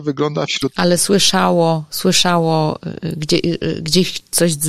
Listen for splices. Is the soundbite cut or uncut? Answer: uncut